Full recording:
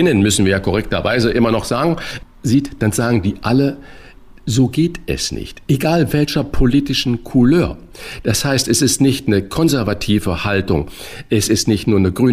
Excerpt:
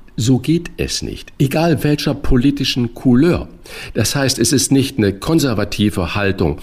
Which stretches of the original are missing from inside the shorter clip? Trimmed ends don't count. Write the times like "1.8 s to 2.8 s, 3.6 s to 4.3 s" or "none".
none